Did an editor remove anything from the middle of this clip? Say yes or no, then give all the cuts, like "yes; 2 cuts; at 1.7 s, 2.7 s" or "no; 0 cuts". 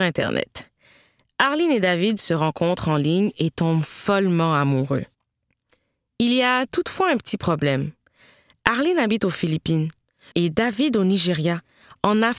yes; 1 cut; at 10.3 s